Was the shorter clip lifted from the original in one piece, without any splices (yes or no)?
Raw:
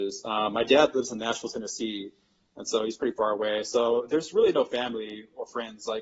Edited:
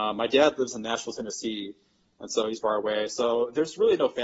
no